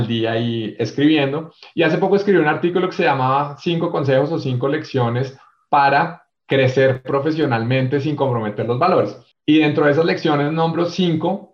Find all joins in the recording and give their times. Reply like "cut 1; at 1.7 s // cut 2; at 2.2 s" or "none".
none